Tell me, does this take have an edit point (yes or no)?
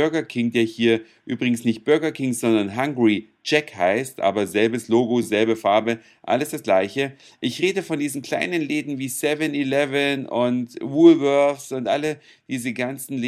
no